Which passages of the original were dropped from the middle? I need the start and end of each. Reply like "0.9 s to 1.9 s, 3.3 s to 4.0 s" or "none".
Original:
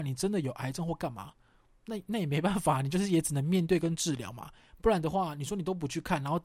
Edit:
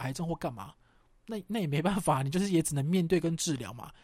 none